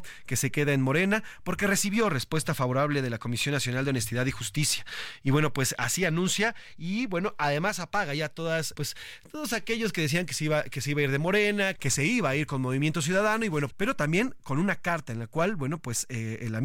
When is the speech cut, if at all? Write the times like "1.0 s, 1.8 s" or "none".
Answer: 8.7 s, 11.8 s, 13.7 s